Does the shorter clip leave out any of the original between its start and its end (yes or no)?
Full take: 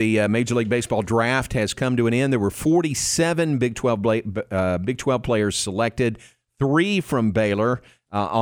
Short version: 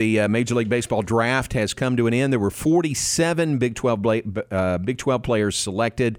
no